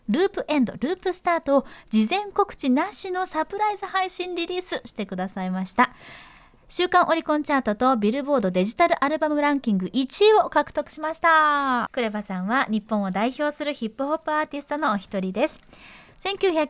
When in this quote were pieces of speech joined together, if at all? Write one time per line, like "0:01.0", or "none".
0:11.9